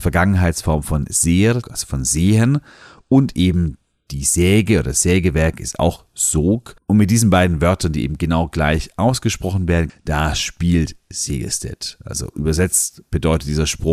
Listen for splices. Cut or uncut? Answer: cut